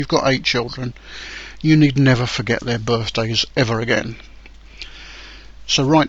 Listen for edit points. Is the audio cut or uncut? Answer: uncut